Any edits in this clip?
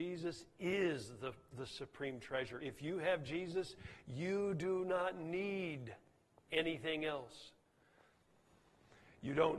no; 0 cuts

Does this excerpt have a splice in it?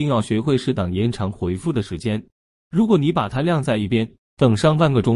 no; 0 cuts

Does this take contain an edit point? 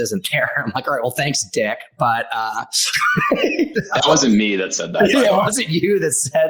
no; 0 cuts

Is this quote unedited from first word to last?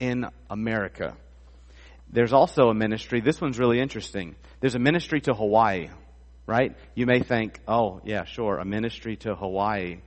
yes; 0 cuts

